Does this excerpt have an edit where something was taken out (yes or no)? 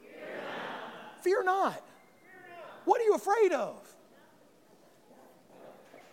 no